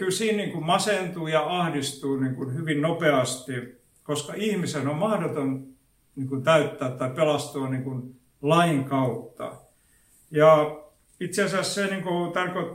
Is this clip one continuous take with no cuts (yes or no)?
yes